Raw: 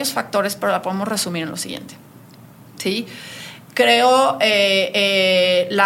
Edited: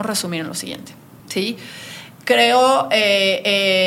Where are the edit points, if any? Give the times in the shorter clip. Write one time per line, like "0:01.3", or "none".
0:01.2